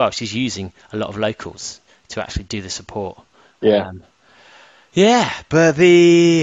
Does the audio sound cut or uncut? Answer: uncut